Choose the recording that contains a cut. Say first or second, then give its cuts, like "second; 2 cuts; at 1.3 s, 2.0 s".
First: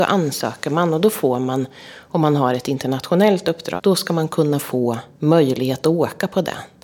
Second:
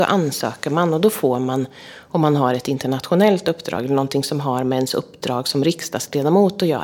first; 2 cuts; at 3.8 s, 5.1 s